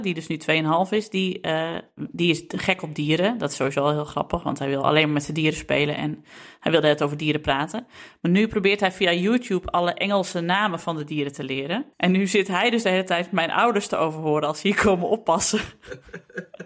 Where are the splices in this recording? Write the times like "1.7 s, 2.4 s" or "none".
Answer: 11.9 s